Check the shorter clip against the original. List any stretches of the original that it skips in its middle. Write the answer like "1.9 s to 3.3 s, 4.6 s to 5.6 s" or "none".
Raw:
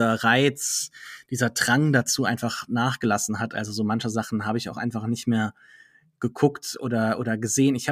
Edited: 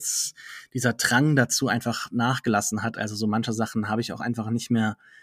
none